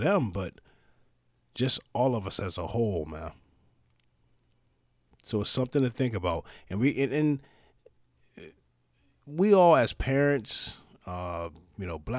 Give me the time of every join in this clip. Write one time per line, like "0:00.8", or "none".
none